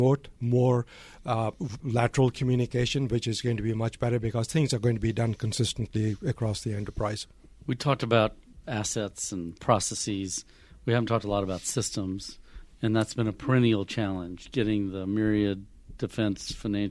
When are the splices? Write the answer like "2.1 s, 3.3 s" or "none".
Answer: 1.8 s